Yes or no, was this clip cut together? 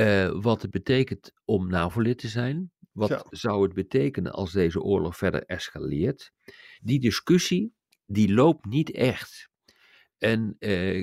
yes